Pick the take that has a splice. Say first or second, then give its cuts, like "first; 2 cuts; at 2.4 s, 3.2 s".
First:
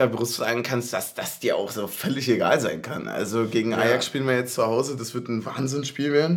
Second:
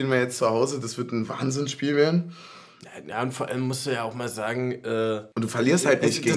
second; 1 cut; at 5.3 s